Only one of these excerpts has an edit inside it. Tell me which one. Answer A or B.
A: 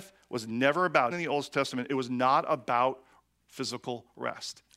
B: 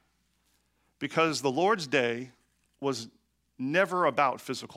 A